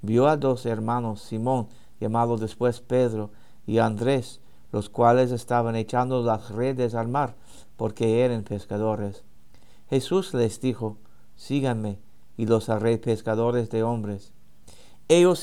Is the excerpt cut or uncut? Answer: uncut